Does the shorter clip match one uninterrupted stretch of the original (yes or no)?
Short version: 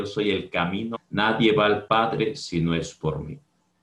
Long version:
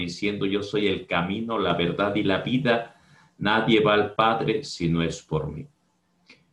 no